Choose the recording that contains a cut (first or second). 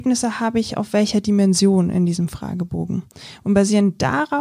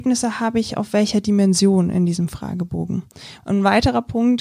second